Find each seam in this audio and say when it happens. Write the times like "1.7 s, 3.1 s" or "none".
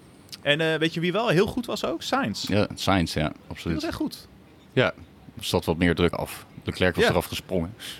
6.1 s